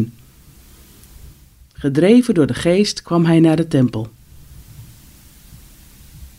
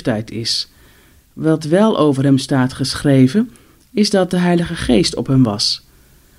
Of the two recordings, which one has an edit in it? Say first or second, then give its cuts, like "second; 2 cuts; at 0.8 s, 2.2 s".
second; 1 cut; at 1.3 s